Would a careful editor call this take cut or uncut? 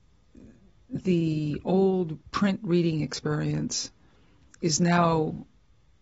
uncut